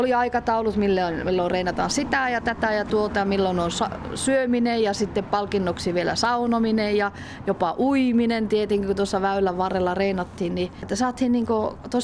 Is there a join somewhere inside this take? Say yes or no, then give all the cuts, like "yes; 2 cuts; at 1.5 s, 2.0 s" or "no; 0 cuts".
yes; 1 cut; at 10.8 s